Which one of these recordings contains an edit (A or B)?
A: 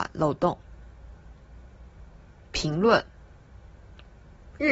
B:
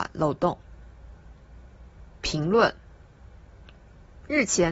B